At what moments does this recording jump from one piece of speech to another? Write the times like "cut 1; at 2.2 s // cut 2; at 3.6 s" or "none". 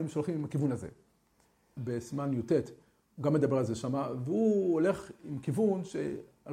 cut 1; at 1.8 s